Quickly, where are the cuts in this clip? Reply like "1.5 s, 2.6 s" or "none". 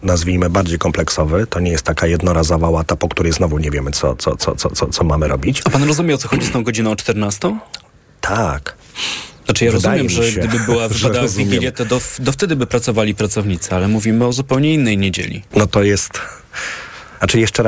15.5 s

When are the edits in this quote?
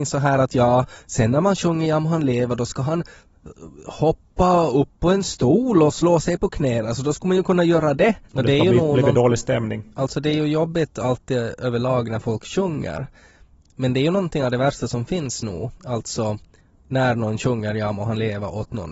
8.3 s

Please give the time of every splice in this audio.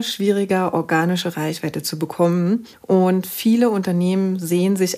none

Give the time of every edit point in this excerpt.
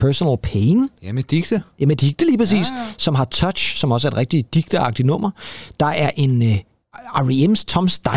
none

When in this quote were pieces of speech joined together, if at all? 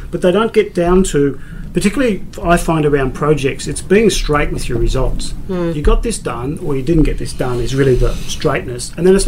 none

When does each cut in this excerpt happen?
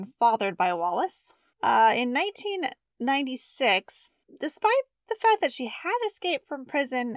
none

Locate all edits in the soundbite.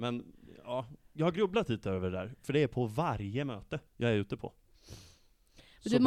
3.9 s

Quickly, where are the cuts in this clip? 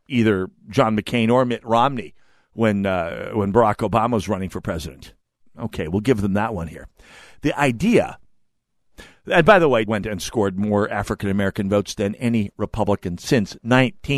9.9 s

